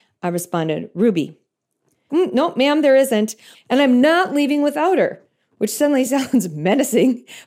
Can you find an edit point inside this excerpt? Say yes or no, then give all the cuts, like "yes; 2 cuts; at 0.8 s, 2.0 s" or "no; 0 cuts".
yes; 2 cuts; at 2.1 s, 3.5 s